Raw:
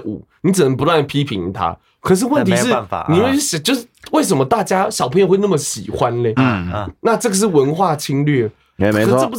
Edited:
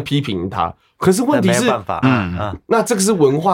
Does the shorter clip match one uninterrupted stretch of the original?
no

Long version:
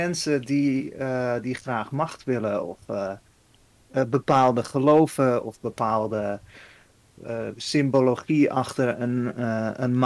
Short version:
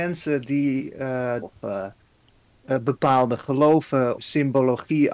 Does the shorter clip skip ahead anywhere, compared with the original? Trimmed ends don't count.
yes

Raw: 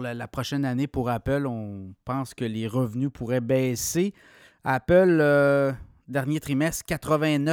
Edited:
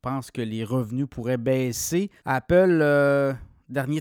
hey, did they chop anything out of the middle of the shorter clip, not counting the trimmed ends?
yes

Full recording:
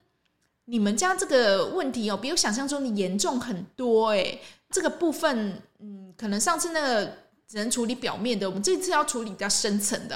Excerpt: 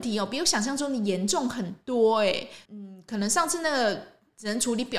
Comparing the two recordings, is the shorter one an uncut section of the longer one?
no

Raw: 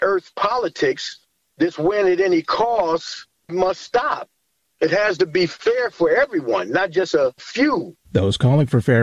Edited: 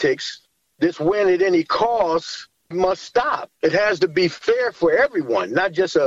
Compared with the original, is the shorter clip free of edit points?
no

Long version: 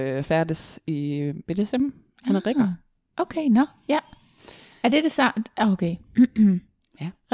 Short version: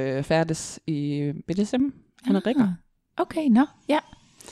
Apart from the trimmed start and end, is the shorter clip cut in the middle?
no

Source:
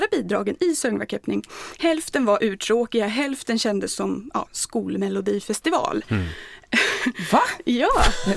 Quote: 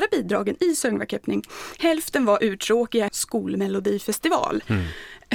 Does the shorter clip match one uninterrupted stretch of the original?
no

